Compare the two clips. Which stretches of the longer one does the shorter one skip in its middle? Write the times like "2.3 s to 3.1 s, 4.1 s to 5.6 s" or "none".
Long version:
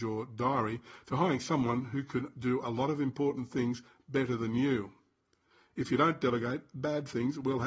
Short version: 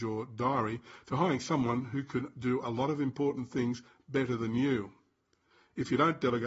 none